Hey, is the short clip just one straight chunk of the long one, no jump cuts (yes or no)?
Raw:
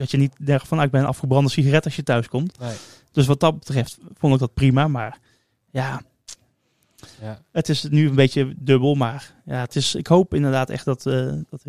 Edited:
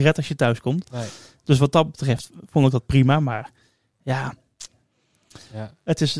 yes